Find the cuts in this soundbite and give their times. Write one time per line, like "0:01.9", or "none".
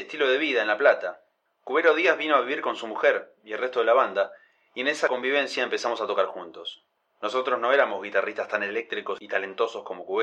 none